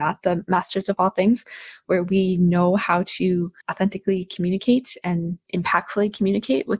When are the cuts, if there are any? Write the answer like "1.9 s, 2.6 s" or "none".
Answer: 3.6 s, 5.4 s